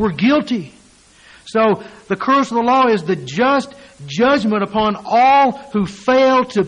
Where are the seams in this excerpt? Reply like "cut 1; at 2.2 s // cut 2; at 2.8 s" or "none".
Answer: none